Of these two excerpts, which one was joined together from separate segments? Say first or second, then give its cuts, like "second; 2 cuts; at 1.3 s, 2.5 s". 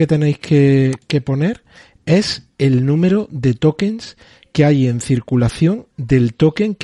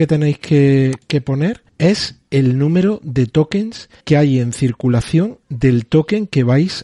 second; 2 cuts; at 1.7 s, 4.0 s